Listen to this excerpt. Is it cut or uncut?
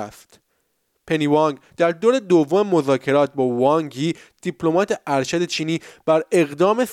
uncut